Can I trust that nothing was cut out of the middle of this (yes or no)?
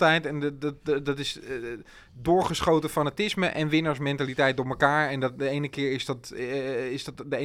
yes